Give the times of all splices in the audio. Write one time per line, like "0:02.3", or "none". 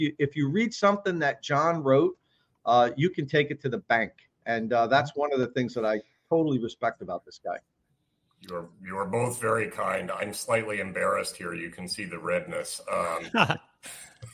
none